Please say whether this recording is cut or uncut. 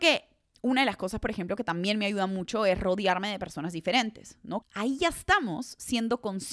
cut